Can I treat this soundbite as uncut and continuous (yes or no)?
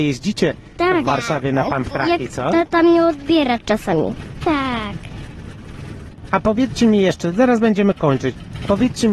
no